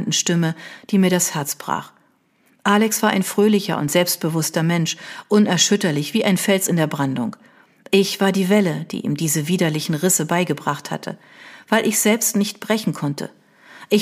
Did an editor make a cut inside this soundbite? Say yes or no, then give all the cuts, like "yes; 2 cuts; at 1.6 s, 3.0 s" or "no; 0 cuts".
no; 0 cuts